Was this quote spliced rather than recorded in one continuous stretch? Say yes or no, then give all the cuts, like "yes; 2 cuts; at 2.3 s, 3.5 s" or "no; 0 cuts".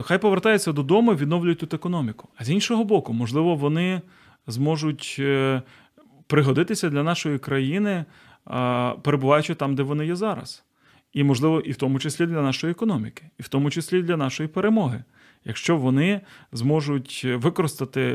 yes; 1 cut; at 2.3 s